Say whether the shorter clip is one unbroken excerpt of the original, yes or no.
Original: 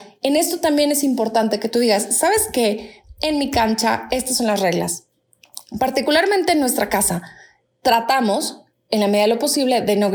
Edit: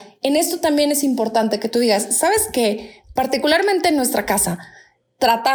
no